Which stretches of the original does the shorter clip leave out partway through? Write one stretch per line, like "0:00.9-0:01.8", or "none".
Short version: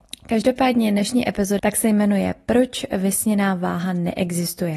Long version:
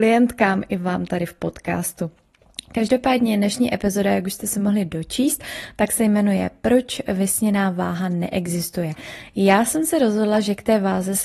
0:04.0-0:05.7